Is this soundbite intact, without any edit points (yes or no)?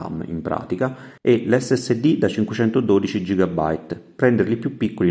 no